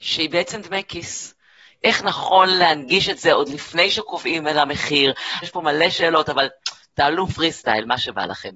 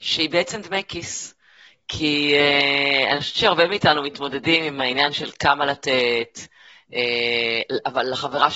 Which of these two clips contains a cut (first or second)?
first